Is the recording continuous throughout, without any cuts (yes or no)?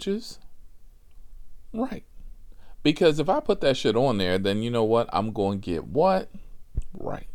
yes